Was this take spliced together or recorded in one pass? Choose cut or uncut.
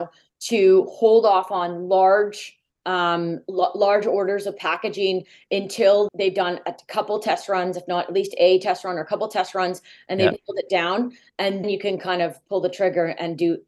cut